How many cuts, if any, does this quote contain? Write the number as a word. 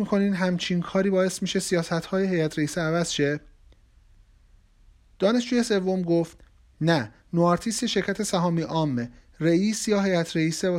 zero